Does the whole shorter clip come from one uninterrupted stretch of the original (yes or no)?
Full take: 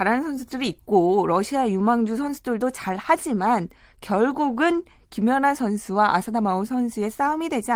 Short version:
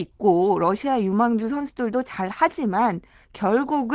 yes